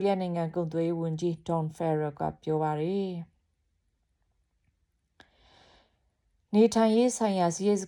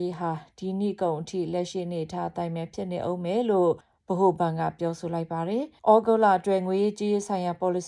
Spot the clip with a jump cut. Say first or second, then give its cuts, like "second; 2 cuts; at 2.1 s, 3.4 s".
second; 1 cut; at 5.8 s